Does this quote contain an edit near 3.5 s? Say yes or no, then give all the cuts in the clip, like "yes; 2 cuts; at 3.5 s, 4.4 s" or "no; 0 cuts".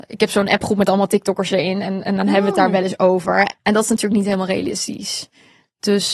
yes; 1 cut; at 3.5 s